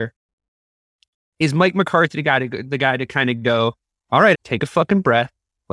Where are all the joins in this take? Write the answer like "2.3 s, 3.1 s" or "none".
4.3 s

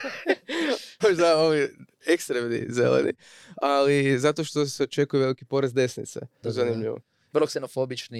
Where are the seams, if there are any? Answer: 1.0 s, 6.4 s

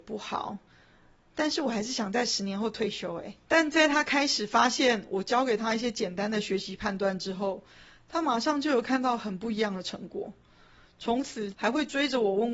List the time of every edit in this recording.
3.5 s, 11.5 s

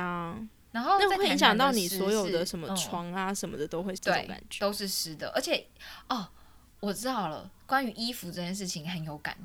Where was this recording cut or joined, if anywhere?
4.0 s

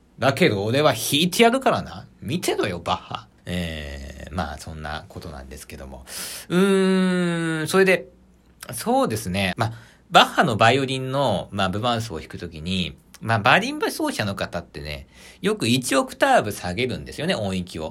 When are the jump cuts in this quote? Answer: 3.4 s, 9.5 s

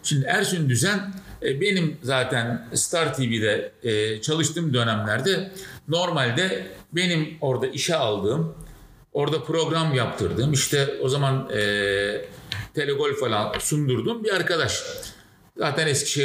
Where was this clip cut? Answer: none

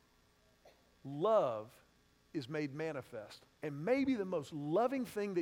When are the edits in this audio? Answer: 3.5 s

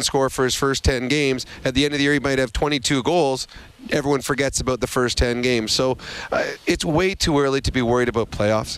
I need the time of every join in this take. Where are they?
none

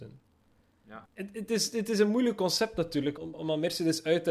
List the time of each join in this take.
1.1 s, 3.2 s

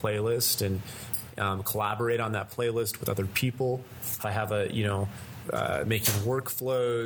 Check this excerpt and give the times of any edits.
4.2 s, 5.4 s

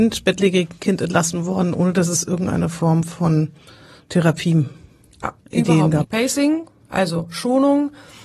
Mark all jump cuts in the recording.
6.0 s

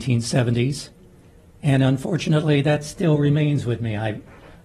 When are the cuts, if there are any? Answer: none

